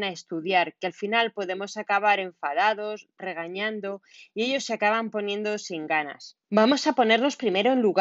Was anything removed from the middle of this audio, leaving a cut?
yes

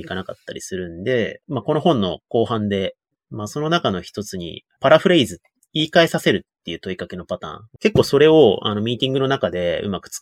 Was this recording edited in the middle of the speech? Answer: yes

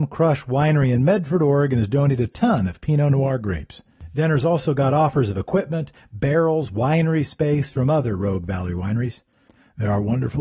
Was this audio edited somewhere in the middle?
no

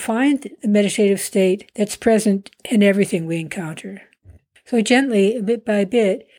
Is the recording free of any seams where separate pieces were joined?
yes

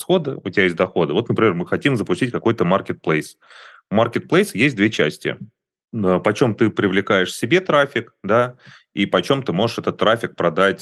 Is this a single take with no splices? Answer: yes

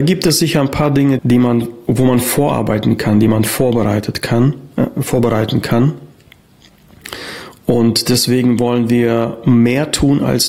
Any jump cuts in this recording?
yes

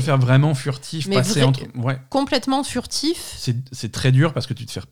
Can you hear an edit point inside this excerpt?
no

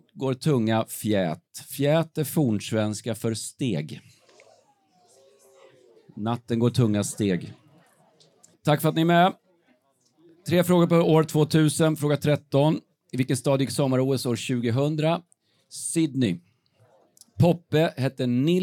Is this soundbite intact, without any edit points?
no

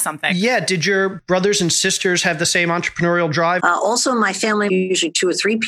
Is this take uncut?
no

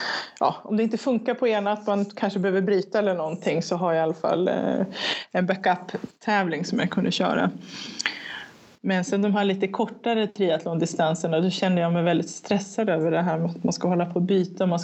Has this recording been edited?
yes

